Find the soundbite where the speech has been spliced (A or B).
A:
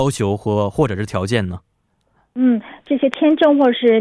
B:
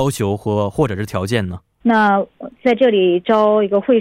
B